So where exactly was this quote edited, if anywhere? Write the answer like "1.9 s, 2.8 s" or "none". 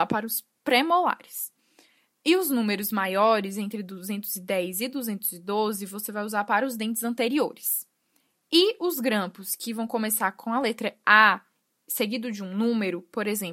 none